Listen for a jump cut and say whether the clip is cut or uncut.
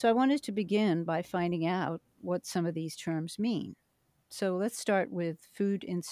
uncut